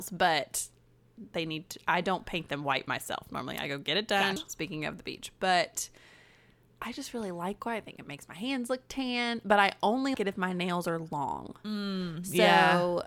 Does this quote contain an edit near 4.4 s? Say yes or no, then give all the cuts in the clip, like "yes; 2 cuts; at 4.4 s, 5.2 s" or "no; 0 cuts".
yes; 2 cuts; at 4.4 s, 10.1 s